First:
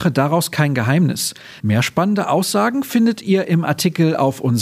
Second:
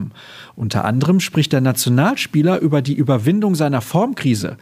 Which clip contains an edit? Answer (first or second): first